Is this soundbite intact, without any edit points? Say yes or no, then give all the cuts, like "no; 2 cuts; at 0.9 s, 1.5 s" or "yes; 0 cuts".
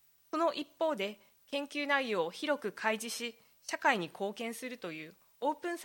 yes; 0 cuts